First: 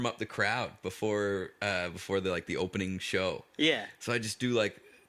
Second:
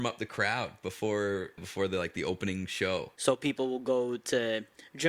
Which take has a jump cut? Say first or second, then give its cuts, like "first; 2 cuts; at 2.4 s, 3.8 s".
second; 2 cuts; at 1.6 s, 3.2 s